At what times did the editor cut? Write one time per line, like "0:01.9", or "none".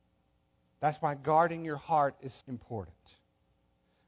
0:02.4